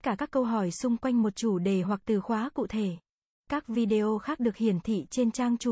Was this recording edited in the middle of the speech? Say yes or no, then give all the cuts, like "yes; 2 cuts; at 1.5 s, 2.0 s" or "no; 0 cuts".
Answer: yes; 1 cut; at 3.4 s